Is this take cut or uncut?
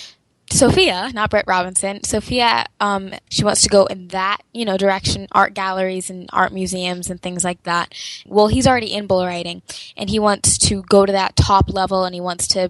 cut